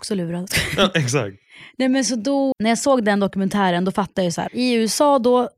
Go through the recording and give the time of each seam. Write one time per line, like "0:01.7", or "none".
0:02.5
0:04.5